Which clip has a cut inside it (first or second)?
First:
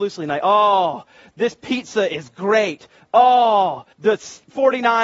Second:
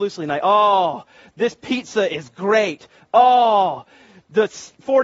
first